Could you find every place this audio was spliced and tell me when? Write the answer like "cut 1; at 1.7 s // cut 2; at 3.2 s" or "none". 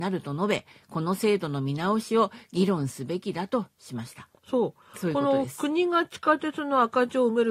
cut 1; at 4.3 s